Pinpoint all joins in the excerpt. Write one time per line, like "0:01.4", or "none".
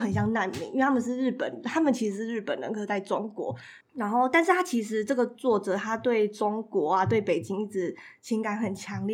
0:03.8